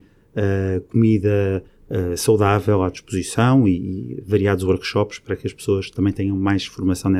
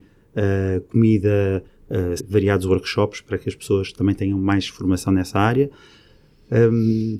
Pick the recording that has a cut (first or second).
second